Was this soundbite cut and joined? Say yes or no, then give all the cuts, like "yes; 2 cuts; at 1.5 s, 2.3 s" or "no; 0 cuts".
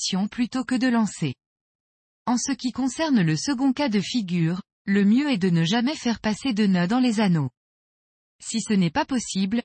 no; 0 cuts